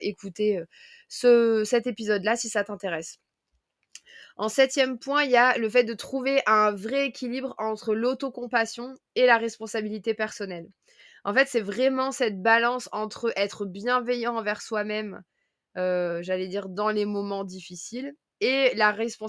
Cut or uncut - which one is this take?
uncut